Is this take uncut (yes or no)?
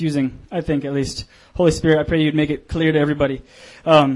yes